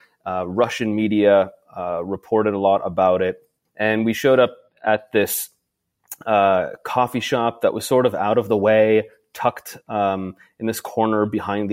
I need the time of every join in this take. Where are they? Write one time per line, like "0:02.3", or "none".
0:03.6